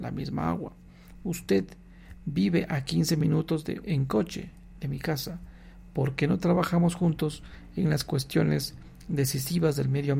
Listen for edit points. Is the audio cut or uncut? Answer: cut